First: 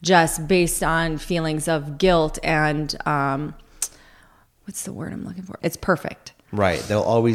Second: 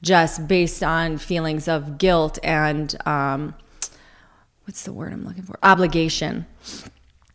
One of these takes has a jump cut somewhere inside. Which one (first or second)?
first